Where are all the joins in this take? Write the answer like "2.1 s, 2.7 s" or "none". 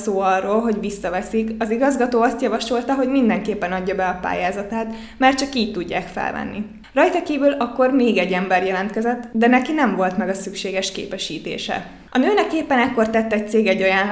none